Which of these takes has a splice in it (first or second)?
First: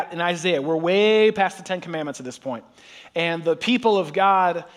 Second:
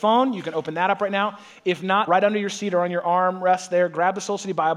second